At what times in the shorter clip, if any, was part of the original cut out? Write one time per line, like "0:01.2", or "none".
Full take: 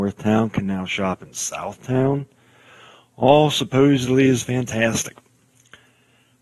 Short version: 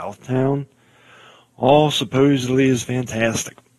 none